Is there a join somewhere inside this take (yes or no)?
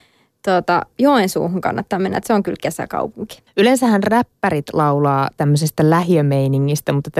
yes